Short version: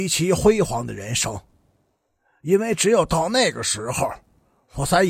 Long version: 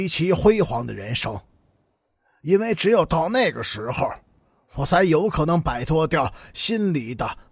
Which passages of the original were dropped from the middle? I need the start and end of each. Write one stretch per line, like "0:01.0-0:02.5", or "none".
none